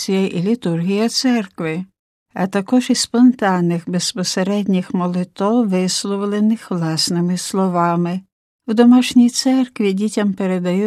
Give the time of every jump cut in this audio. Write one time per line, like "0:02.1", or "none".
none